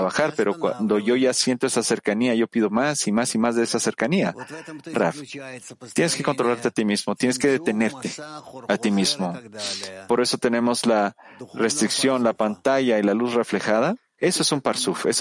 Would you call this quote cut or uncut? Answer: cut